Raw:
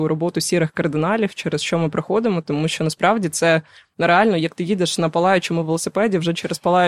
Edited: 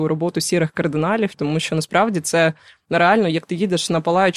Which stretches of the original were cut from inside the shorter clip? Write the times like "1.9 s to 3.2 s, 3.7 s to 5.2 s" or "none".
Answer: 1.3 s to 2.4 s